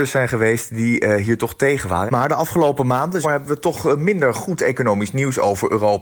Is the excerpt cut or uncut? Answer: cut